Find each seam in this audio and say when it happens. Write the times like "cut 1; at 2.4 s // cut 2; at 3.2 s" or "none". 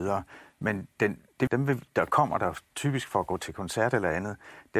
cut 1; at 1.5 s